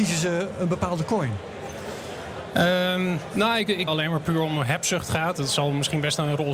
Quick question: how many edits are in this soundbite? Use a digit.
1